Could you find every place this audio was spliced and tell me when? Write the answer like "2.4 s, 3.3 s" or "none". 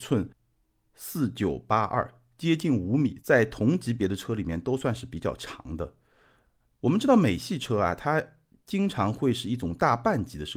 3.2 s